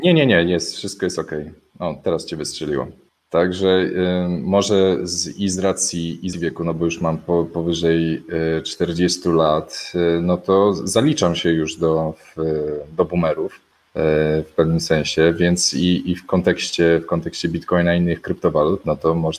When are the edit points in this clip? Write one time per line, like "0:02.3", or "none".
0:06.3